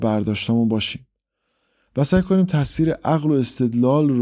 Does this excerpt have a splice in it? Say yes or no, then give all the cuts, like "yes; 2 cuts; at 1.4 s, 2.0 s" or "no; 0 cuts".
no; 0 cuts